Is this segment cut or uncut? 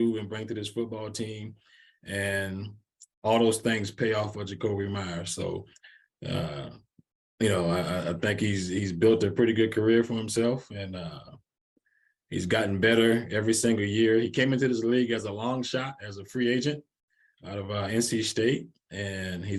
uncut